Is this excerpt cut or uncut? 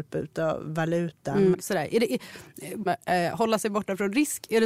cut